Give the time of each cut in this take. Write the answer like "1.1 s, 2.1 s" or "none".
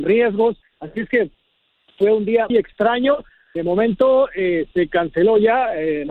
2.5 s